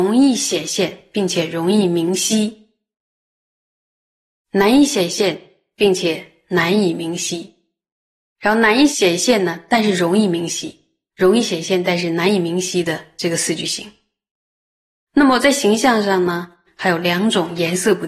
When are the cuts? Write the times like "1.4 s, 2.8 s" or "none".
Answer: 16.7 s